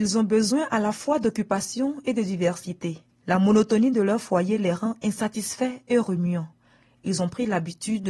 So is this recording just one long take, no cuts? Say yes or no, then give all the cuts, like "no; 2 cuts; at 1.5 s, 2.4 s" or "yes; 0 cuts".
yes; 0 cuts